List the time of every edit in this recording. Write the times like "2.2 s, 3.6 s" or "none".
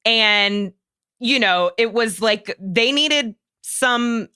none